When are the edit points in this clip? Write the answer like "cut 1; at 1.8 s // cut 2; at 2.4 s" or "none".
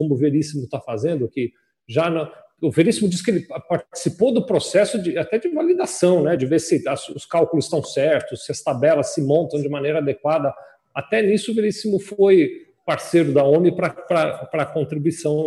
none